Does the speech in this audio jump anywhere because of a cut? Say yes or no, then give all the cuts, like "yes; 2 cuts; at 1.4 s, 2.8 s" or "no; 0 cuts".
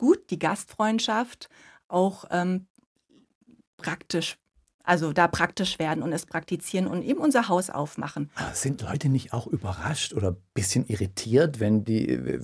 no; 0 cuts